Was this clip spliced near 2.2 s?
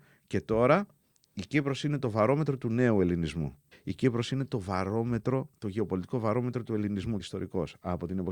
no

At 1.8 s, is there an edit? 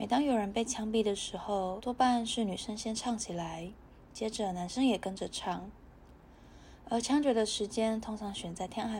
yes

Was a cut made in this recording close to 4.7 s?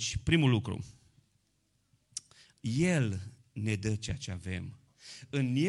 no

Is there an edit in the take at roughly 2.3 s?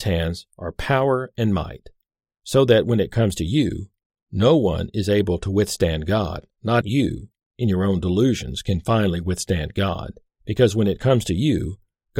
no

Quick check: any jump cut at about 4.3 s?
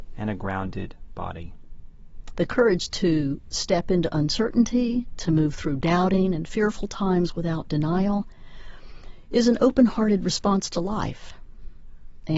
no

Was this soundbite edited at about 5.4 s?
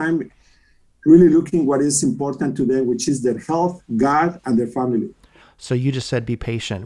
yes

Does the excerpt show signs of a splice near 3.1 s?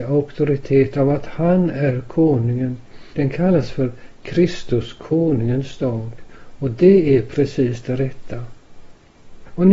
yes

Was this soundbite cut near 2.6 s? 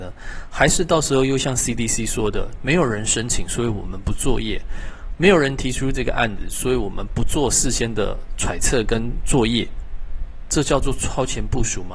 no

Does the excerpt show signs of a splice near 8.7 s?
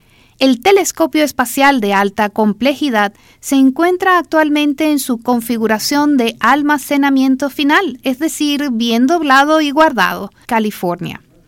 no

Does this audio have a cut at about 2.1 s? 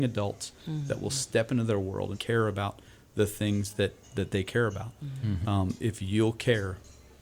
yes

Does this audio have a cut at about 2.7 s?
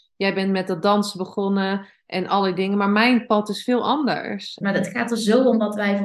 no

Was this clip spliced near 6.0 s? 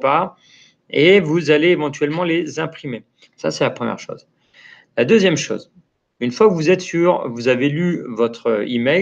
no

